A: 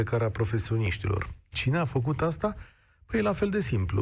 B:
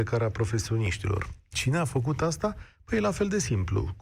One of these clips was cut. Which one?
B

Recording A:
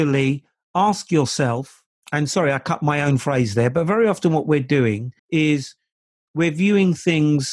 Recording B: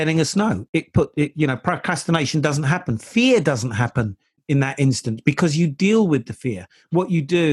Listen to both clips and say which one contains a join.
A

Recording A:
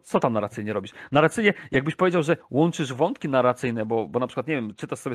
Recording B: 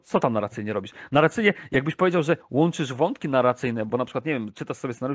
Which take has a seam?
B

